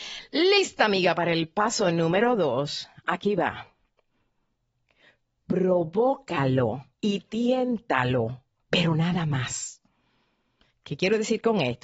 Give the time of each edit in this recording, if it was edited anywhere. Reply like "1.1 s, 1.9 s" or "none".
6.9 s